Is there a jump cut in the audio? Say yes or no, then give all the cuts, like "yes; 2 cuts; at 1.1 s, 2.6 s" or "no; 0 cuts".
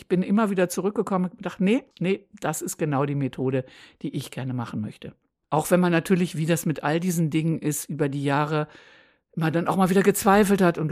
yes; 1 cut; at 5.4 s